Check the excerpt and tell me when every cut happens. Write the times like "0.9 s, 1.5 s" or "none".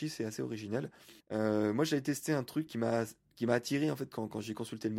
1.2 s, 2.7 s